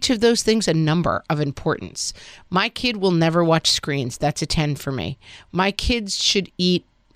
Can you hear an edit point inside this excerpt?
no; 0 cuts

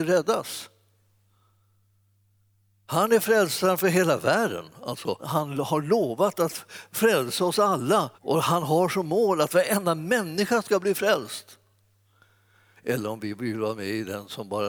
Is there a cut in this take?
yes; 3 cuts; at 5.2 s, 8.1 s, 12.8 s

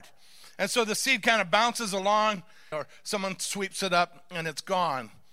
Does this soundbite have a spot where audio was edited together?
yes; 1 cut; at 2.7 s

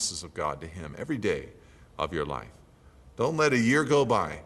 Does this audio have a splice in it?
no; 0 cuts

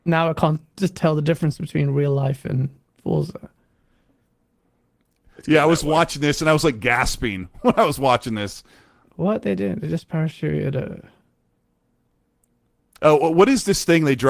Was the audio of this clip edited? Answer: no; 0 cuts

